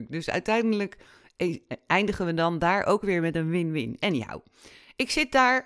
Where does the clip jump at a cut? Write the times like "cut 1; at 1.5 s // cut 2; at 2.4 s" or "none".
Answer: none